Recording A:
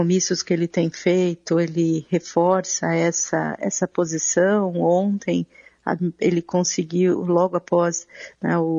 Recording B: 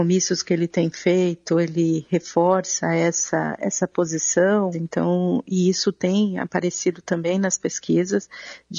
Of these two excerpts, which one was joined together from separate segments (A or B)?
B